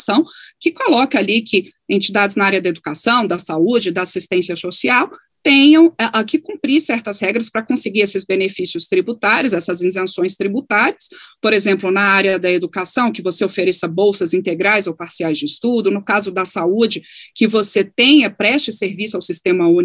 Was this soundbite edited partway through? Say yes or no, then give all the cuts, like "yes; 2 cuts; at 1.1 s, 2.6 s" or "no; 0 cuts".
no; 0 cuts